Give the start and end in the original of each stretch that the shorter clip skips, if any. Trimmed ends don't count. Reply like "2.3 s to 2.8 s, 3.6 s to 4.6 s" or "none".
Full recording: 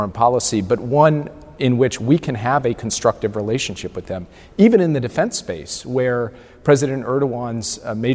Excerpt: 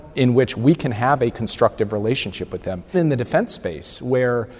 4.4 s to 4.8 s